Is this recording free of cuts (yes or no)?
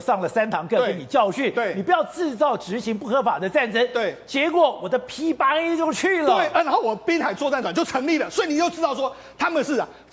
yes